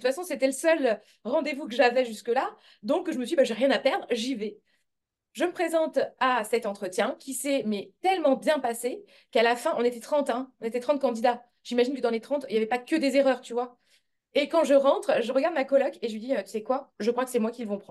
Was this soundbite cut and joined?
no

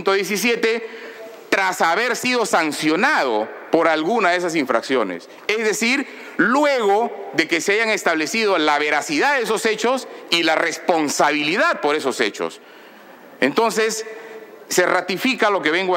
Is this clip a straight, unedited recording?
yes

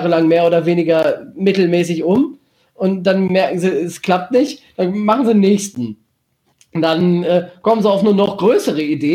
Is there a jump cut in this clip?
no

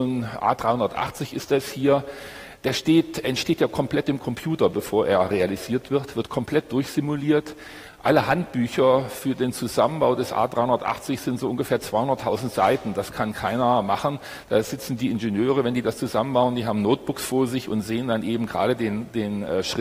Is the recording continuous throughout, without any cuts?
yes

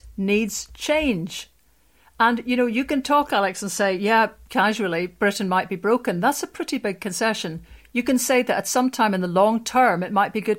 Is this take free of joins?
yes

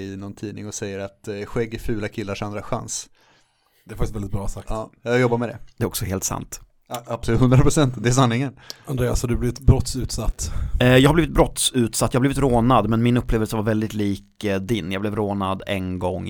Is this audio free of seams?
yes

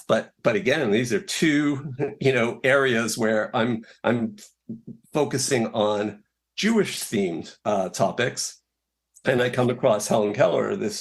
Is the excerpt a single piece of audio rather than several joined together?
no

